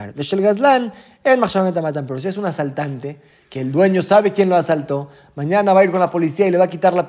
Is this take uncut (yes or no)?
yes